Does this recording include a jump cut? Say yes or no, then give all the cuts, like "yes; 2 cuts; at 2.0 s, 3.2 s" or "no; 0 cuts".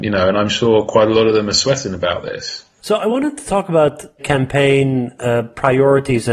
yes; 2 cuts; at 2.8 s, 4.2 s